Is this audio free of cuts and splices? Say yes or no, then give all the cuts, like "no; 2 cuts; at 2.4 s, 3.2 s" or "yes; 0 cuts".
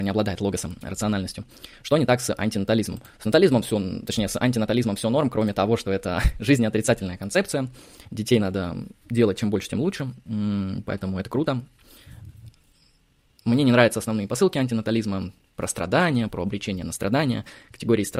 no; 1 cut; at 15.4 s